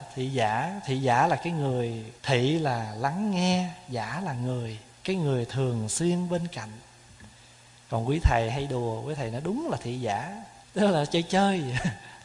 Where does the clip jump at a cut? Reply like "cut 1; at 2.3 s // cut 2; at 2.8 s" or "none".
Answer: cut 1; at 2.2 s // cut 2; at 4.9 s // cut 3; at 10.6 s